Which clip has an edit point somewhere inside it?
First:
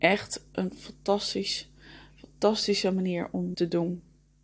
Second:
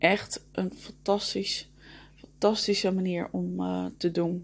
first; 1 cut; at 3.5 s

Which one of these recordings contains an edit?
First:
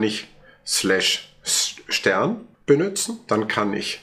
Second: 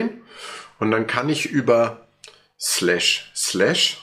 first; 1 cut; at 2.5 s

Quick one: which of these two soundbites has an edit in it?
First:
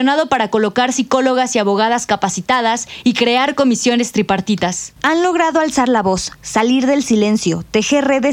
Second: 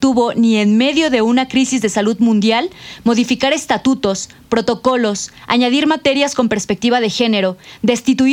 first; 1 cut; at 5.0 s

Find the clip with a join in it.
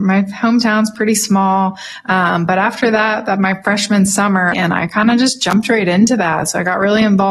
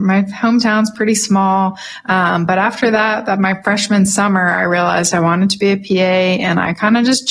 first; 1 cut; at 4.5 s

